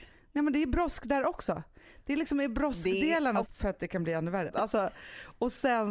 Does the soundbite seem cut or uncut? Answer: cut